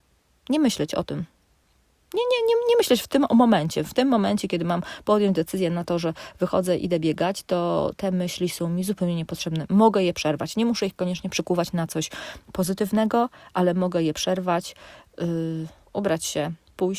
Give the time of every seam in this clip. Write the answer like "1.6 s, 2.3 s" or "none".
none